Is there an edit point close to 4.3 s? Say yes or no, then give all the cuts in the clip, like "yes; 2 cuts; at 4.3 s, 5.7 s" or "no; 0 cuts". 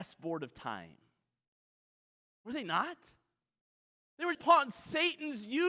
yes; 1 cut; at 4.3 s